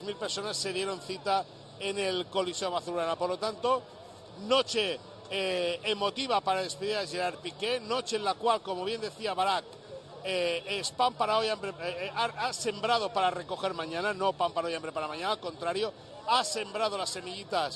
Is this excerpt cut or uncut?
uncut